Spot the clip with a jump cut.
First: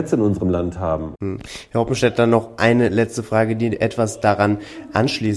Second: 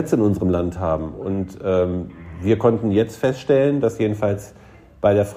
first; 1 cut; at 1.1 s

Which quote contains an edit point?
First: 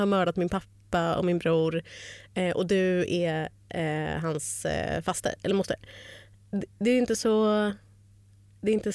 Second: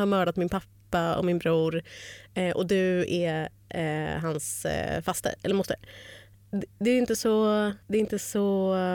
second; 1 cut; at 7.8 s

